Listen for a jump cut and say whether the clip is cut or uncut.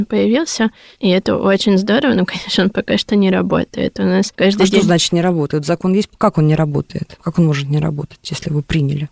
uncut